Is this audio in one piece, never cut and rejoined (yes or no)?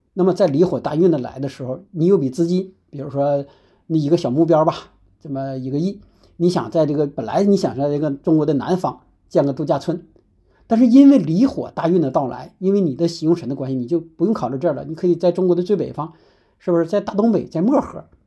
yes